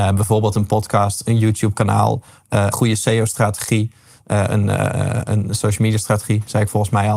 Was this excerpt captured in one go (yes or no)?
no